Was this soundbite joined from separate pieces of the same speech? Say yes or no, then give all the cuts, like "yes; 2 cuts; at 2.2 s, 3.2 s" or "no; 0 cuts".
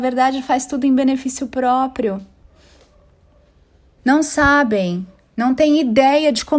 yes; 1 cut; at 4.0 s